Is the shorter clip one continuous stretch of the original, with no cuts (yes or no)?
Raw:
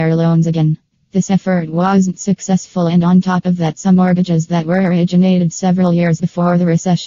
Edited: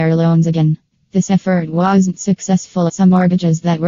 no